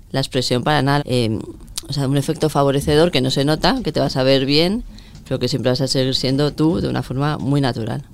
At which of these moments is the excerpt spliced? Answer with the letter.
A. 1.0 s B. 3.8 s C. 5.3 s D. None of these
A